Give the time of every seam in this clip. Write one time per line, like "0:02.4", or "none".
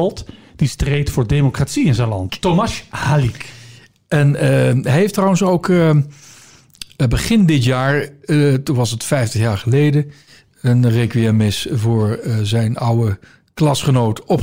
0:02.3